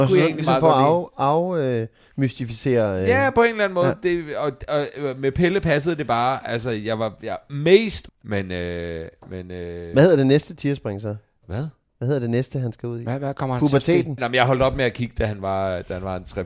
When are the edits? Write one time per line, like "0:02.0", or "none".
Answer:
0:08.1
0:14.2